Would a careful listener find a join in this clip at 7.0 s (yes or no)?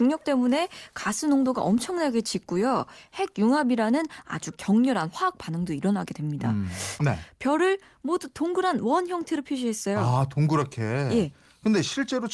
yes